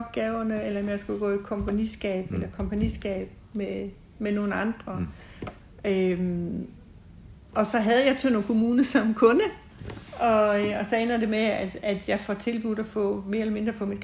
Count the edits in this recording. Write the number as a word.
zero